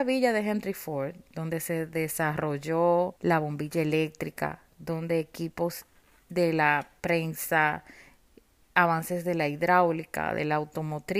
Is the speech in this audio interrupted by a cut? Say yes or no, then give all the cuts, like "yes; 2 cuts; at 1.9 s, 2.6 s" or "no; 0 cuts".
yes; 1 cut; at 3.2 s